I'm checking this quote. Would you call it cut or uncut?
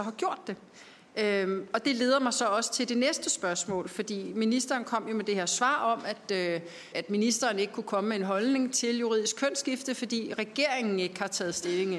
cut